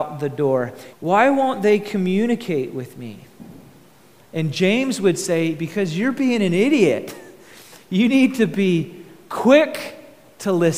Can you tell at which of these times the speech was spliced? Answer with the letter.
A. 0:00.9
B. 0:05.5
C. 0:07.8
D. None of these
A